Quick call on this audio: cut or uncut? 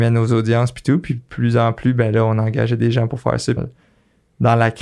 cut